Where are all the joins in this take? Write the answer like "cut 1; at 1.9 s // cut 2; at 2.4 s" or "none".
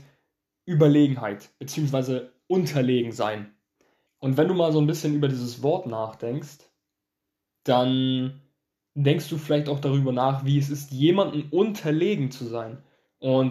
cut 1; at 4.1 s